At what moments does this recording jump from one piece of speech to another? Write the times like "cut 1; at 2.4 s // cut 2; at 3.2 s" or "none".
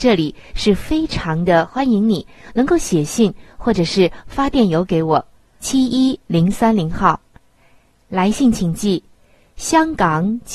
cut 1; at 5.6 s